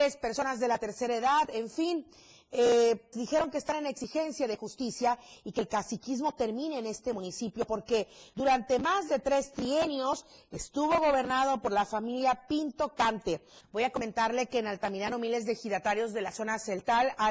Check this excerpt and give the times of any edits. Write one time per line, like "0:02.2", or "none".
0:03.1
0:13.6